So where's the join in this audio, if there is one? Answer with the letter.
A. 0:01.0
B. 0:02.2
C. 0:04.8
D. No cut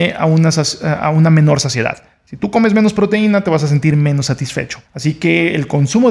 C